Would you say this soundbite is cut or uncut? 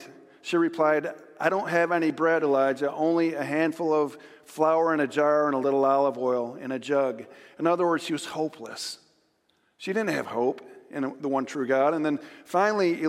uncut